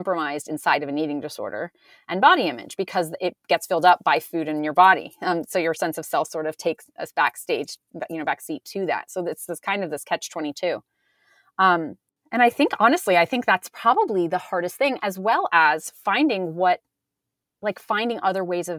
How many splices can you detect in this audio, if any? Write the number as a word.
zero